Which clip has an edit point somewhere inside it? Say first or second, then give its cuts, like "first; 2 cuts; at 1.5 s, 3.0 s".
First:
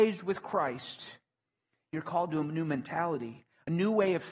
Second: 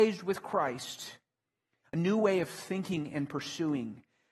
second; 1 cut; at 1.8 s